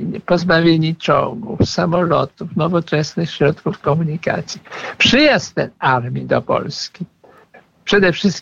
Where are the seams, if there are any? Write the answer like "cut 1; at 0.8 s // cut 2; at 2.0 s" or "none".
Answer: none